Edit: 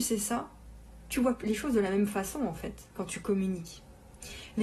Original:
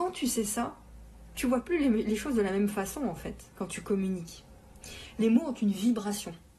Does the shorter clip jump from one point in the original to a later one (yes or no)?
yes